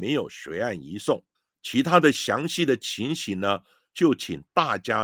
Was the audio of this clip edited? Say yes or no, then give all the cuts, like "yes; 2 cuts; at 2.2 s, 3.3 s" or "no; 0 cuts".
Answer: no; 0 cuts